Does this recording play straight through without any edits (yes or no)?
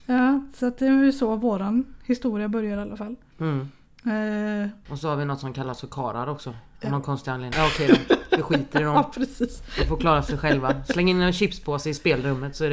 no